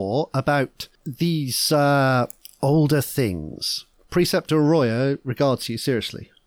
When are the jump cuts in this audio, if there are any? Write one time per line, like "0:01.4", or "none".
0:04.0

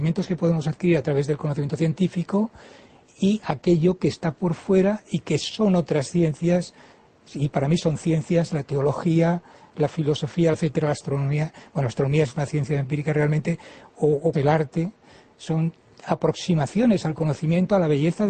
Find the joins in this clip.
0:10.5
0:14.3

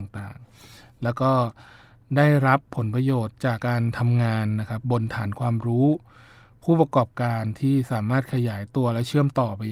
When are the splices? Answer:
0:03.6
0:04.8

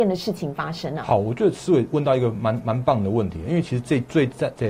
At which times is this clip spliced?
none

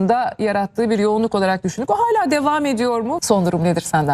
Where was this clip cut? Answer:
0:03.2

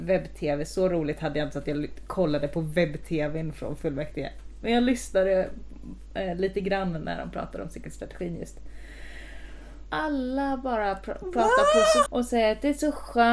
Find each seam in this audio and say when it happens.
0:09.9
0:12.1

